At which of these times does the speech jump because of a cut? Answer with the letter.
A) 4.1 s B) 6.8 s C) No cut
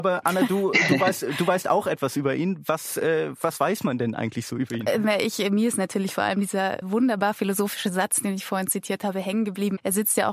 B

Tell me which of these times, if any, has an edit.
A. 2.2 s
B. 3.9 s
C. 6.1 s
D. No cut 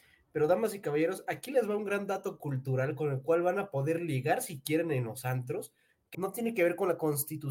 C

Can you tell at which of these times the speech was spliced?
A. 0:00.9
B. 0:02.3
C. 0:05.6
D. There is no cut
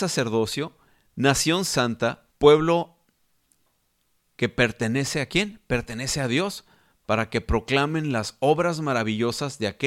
B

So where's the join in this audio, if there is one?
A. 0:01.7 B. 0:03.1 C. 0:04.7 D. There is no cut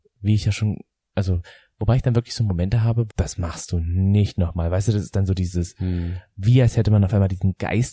B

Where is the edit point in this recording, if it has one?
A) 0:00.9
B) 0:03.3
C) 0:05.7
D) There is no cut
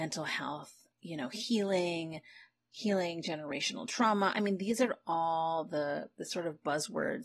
A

